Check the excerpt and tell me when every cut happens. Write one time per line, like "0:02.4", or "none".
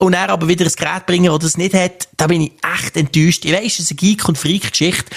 none

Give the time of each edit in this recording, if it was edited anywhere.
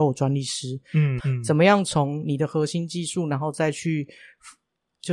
0:01.2

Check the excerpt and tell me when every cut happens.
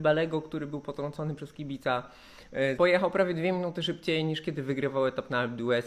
0:02.8

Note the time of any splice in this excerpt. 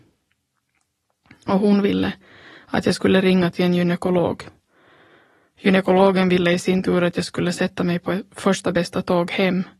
none

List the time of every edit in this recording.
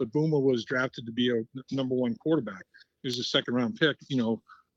none

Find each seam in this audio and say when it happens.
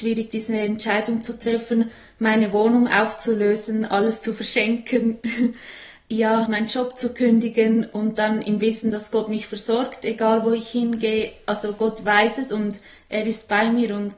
0:06.5

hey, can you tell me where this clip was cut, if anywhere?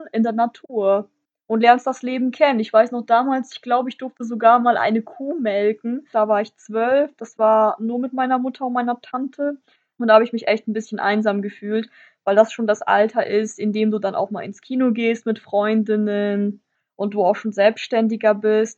0:06.1
0:09.9

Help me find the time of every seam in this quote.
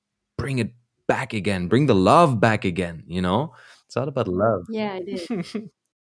0:03.8

